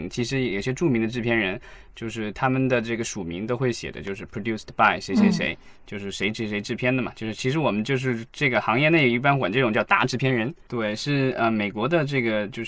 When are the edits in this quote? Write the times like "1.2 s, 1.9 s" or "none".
10.7 s